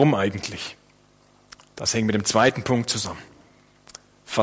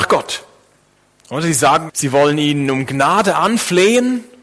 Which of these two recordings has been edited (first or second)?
second